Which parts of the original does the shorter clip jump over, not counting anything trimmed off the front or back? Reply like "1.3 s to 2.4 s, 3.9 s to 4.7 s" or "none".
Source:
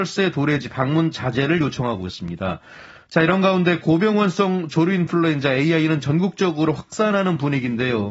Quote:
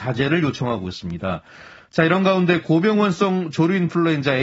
none